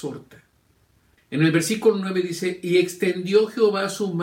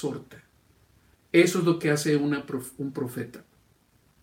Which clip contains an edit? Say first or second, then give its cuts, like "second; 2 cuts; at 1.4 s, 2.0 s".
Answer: first; 1 cut; at 1.2 s